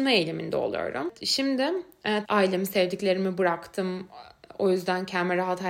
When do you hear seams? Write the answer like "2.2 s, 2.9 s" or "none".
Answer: 2.2 s